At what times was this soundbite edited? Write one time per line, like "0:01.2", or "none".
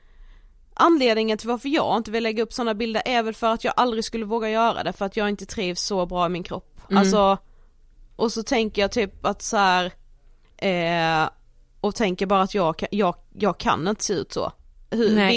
0:10.4